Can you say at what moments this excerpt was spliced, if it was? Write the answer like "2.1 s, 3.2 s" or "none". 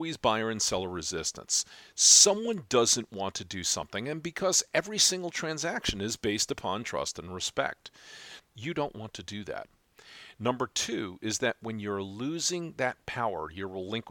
8.4 s